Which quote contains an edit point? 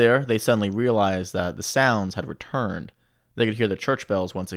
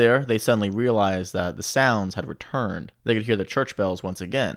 second; 1 cut; at 2.9 s

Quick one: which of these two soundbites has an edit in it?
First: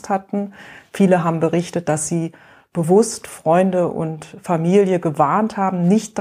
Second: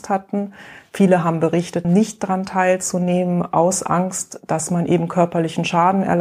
second; 1 cut; at 1.8 s

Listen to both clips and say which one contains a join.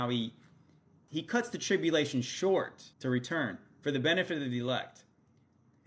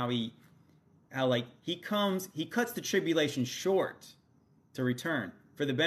first; 2 cuts; at 1.1 s, 2.9 s

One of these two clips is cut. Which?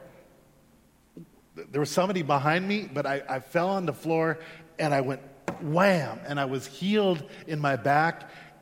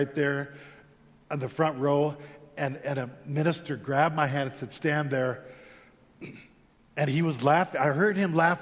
second; 1 cut; at 6.9 s

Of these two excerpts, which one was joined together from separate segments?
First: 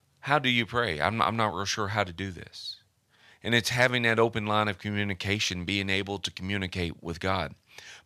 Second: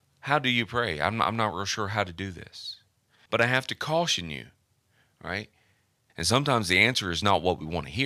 second; 2 cuts; at 3.3 s, 6.1 s

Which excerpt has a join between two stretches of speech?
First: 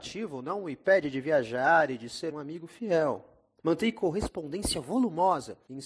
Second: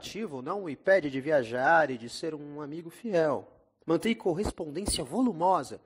first; 1 cut; at 2.3 s

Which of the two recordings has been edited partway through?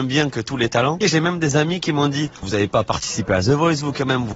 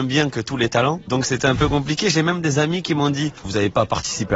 first; 1 cut; at 1.0 s

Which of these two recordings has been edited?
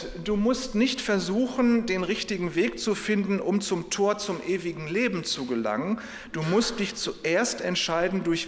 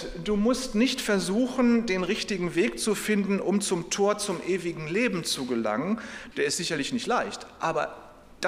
second; 1 cut; at 6.3 s

